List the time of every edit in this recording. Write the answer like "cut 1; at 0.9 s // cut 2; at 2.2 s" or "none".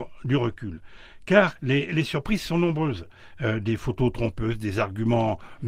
cut 1; at 1.5 s